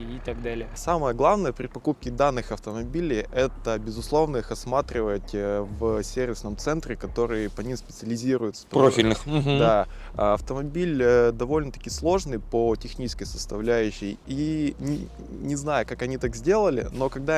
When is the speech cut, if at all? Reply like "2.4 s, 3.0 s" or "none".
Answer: 14.2 s